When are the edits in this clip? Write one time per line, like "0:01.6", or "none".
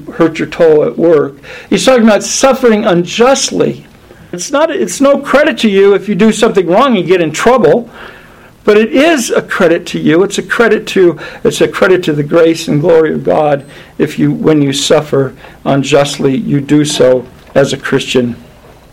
0:04.3